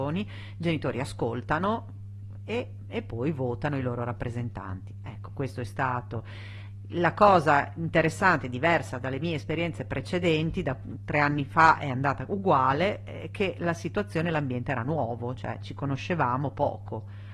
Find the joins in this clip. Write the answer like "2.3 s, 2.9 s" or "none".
none